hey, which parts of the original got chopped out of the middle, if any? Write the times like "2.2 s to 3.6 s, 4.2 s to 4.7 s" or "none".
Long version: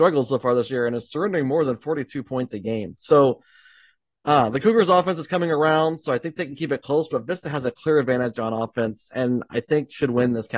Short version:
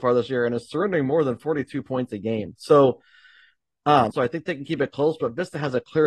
4.5 s to 6.0 s